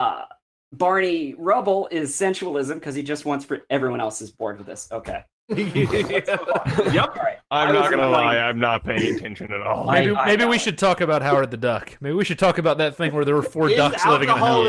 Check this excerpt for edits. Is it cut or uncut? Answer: uncut